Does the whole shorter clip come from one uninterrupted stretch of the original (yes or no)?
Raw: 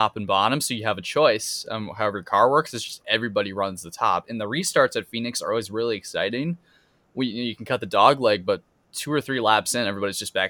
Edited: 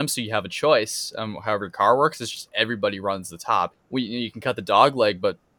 no